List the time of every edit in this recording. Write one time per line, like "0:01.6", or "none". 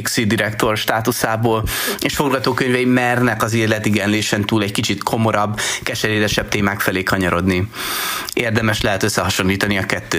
0:08.3